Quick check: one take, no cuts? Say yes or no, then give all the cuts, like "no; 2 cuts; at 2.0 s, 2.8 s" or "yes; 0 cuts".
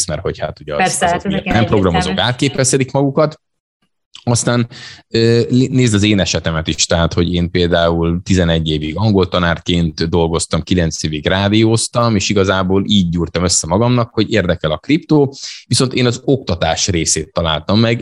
yes; 0 cuts